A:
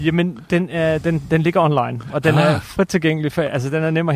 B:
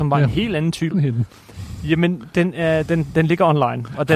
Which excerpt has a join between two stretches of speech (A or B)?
B